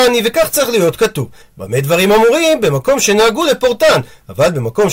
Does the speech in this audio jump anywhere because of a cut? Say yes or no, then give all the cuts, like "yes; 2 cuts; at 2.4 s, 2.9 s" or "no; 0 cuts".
yes; 1 cut; at 1.4 s